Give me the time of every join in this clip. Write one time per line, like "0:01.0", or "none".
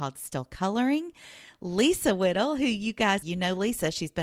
0:03.2